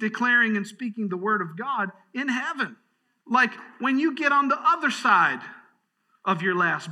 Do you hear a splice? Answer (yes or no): yes